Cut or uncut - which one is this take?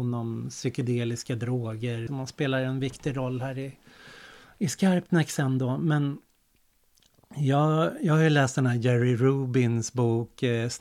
cut